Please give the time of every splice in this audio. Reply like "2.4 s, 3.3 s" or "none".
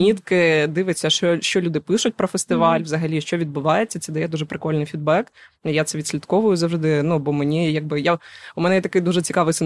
none